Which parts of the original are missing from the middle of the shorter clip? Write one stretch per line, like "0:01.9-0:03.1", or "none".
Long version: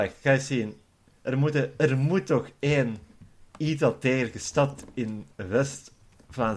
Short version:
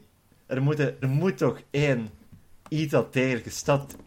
0:01.8-0:01.9